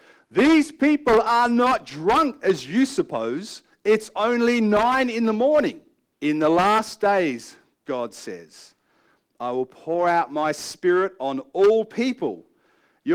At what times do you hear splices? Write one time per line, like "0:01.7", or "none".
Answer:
0:06.1